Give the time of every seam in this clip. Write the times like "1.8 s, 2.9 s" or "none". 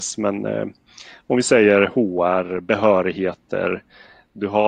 none